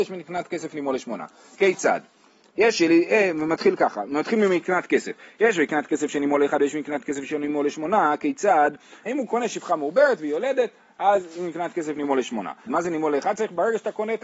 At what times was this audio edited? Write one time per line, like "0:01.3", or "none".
0:09.1
0:12.7